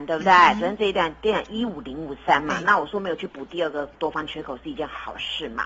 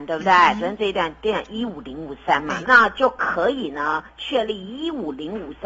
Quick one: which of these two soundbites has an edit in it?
second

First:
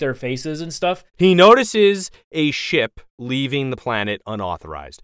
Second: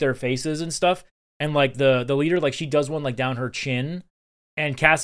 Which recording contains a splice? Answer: first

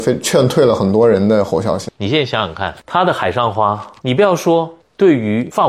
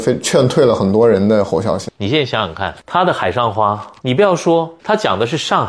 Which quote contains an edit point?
second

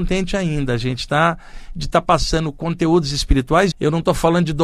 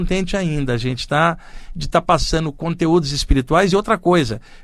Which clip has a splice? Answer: first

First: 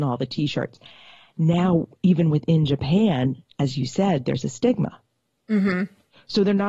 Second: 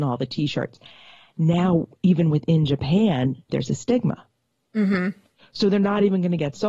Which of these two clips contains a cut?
second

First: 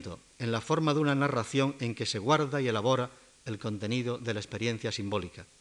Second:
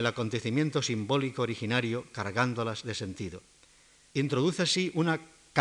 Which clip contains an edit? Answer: second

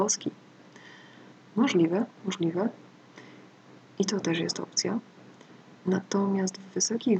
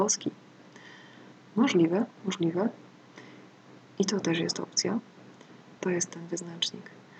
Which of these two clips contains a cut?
second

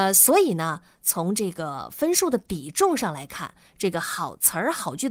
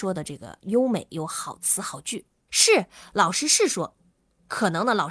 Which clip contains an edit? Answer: second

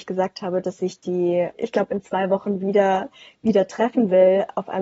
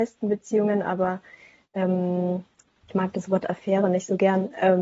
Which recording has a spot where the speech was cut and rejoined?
first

